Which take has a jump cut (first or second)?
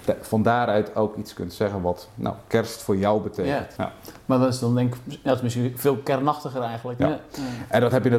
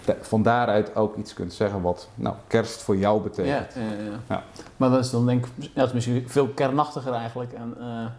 first